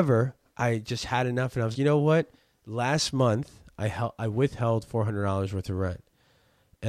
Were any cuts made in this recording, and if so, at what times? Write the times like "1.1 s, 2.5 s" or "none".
1.7 s